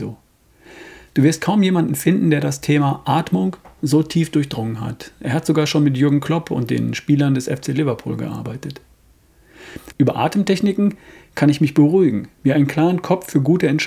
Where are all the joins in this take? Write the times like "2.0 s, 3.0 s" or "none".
9.9 s, 12.4 s